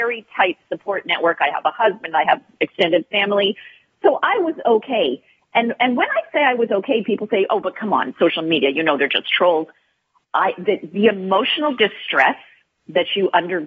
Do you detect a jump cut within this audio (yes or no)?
no